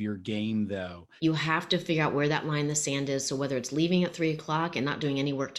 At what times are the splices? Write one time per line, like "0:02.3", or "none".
0:01.2